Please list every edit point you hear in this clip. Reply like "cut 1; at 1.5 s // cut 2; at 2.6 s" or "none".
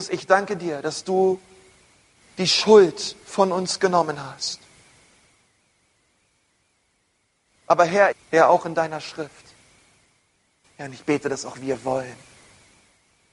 cut 1; at 8.1 s // cut 2; at 10.6 s